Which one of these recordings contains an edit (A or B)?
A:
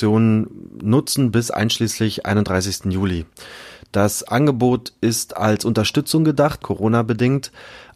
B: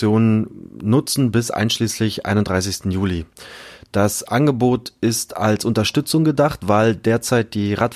A